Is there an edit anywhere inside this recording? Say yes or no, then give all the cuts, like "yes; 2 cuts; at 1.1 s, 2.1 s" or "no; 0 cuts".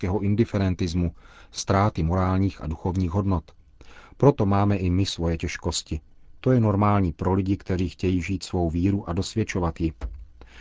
no; 0 cuts